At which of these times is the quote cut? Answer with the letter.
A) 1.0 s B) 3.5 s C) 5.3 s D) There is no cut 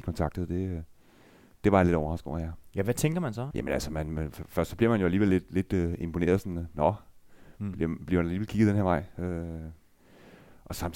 B